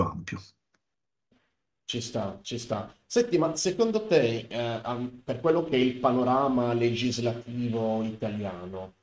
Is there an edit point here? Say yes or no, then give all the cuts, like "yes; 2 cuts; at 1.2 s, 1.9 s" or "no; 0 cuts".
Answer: no; 0 cuts